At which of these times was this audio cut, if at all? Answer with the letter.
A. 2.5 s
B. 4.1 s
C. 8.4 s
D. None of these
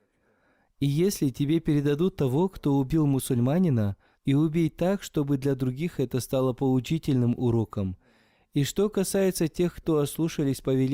B